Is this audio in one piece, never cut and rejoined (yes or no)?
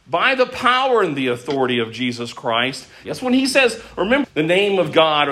no